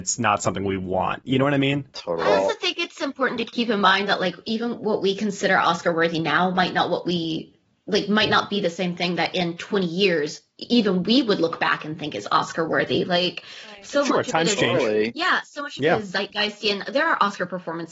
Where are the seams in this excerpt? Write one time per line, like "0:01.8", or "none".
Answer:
none

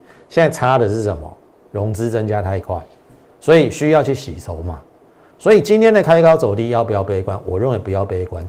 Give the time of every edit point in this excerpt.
none

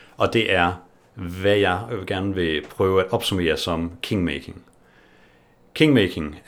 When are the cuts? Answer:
none

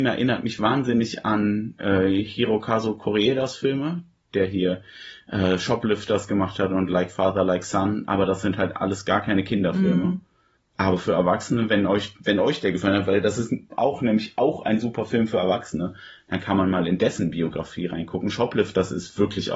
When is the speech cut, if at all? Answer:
none

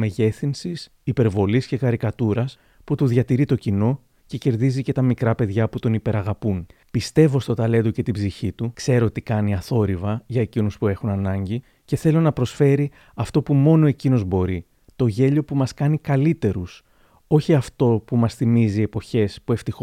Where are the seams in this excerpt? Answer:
0:06.8

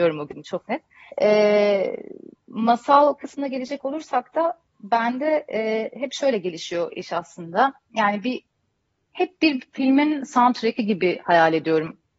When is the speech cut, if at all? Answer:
0:01.1

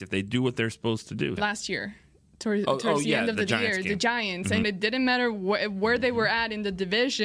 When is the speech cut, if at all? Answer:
0:01.4
0:04.6

